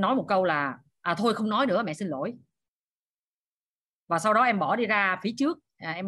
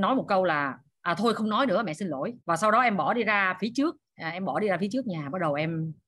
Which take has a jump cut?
second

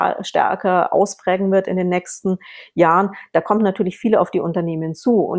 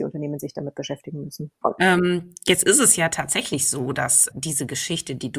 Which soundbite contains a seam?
second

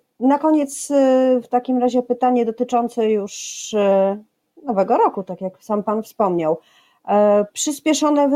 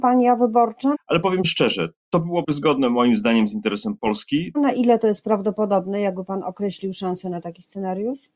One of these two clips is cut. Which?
second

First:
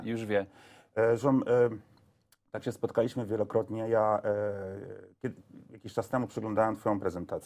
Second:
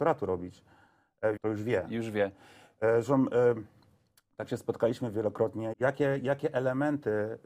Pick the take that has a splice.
second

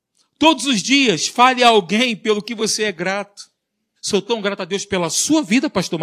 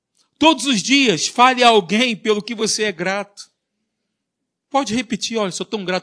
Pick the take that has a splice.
first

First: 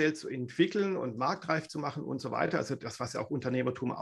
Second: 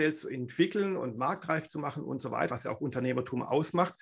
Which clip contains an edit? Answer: second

